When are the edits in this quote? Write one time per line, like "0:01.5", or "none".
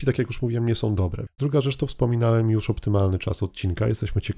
0:01.3